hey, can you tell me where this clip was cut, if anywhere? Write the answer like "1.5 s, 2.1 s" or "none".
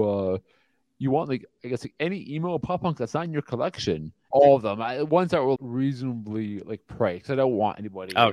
4.3 s, 5.6 s